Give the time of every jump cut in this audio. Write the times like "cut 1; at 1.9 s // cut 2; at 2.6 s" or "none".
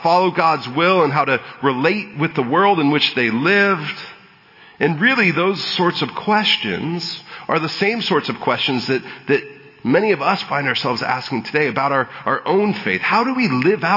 none